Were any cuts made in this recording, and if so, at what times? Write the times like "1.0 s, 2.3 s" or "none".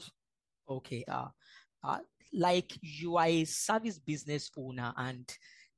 1.1 s